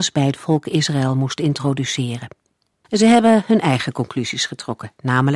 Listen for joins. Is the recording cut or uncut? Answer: cut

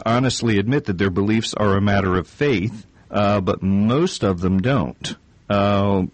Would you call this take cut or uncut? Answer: uncut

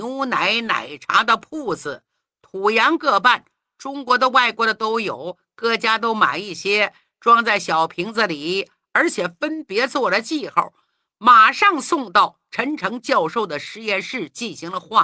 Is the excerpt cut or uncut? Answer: uncut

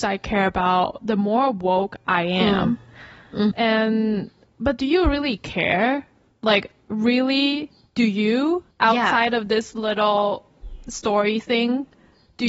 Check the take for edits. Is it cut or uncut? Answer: cut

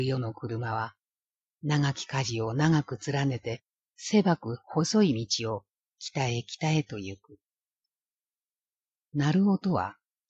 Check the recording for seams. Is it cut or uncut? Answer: cut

